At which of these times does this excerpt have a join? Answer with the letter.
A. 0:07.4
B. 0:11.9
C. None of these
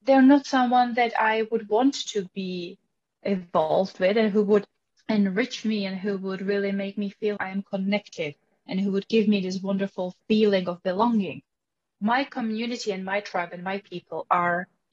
A